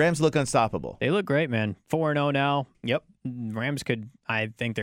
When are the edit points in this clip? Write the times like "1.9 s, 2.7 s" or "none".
2.7 s